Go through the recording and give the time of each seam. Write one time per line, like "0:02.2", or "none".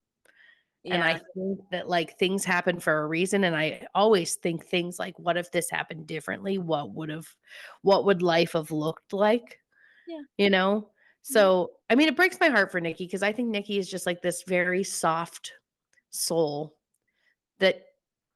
none